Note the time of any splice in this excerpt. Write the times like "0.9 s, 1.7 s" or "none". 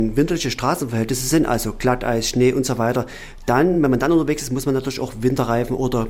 none